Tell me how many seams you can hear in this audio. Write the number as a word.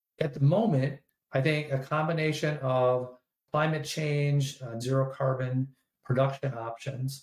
one